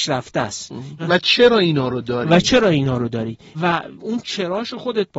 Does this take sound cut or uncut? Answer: cut